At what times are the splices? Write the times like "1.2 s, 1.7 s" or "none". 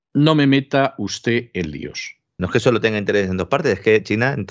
2.4 s